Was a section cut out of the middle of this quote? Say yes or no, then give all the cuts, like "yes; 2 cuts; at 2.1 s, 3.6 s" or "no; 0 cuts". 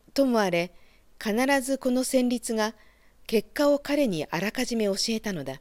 no; 0 cuts